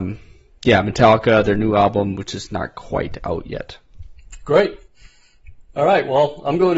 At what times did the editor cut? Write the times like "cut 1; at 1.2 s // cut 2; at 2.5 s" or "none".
cut 1; at 5.7 s